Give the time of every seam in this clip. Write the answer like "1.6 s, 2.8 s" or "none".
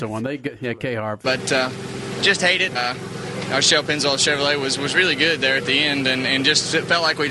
1.2 s, 2.7 s

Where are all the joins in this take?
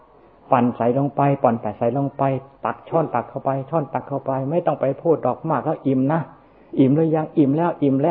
none

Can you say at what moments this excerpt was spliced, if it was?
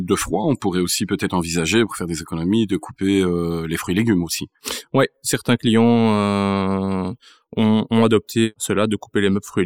none

